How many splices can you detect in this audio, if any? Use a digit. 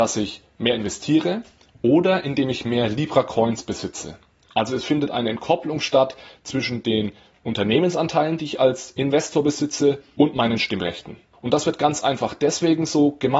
1